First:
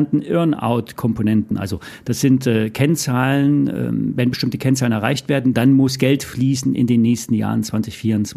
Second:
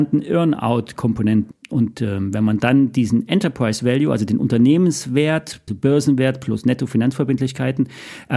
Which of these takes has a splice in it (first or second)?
second